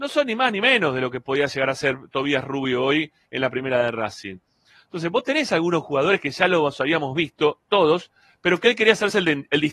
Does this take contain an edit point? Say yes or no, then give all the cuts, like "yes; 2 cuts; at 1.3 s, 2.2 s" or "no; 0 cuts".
no; 0 cuts